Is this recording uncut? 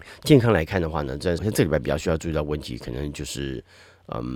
no; 1 cut; at 1.4 s

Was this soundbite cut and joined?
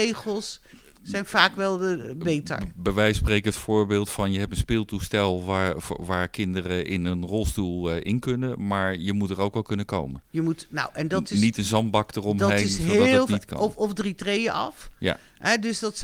no; 0 cuts

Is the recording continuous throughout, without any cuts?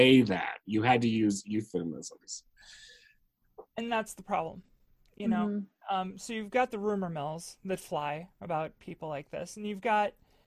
yes; 0 cuts

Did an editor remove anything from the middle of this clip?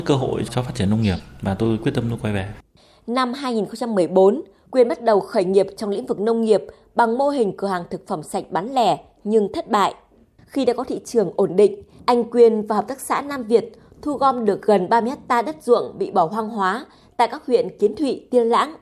yes; 1 cut; at 10.4 s

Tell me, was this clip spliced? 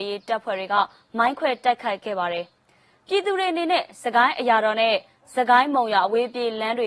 no; 0 cuts

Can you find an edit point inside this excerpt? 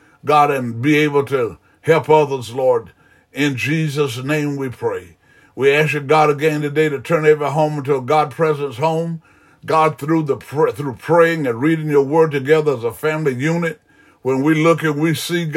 no; 0 cuts

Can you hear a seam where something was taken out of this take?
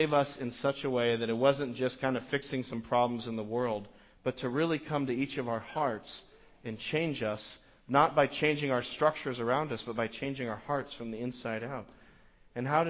no; 0 cuts

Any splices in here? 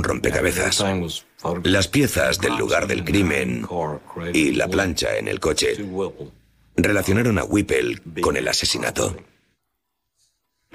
yes; 1 cut; at 1.6 s

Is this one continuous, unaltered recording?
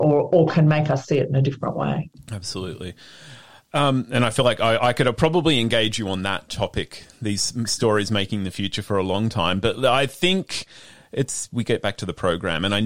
yes; 0 cuts

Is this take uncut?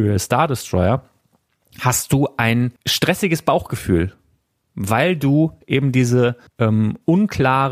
no; 2 cuts; at 2.8 s, 6.5 s

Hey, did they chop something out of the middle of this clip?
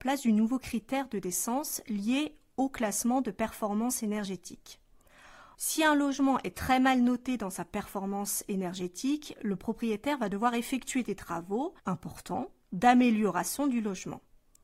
yes; 2 cuts; at 5.5 s, 11.8 s

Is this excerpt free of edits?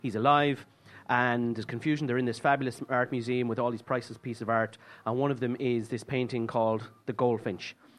yes; 0 cuts

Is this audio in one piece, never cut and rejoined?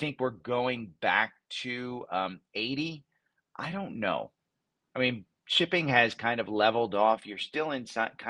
yes; 0 cuts

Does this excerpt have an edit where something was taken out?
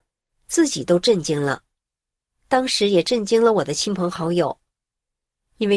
no; 0 cuts

